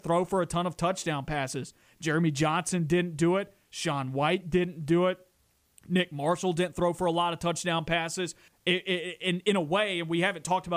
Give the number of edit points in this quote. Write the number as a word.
one